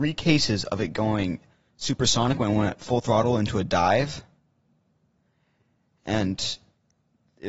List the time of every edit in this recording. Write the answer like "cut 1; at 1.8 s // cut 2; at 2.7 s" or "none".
none